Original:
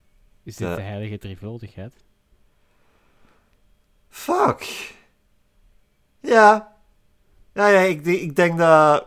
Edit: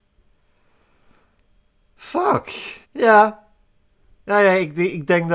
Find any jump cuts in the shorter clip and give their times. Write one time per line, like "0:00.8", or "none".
0:02.8